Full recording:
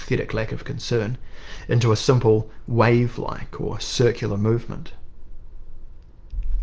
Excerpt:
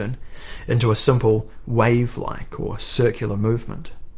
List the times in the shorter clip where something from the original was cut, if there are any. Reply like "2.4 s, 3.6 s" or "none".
none